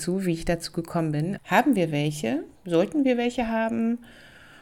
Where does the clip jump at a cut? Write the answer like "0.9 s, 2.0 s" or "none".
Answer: 1.4 s, 2.6 s